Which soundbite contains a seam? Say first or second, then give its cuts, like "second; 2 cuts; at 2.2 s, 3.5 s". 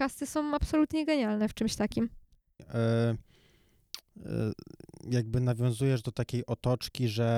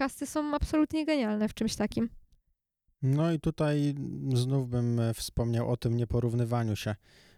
first; 1 cut; at 2.6 s